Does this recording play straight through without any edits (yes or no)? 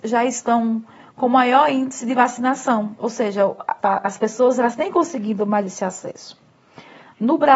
no